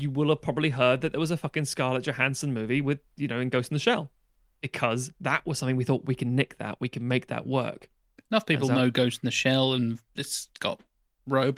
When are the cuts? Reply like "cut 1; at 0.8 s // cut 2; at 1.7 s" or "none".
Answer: none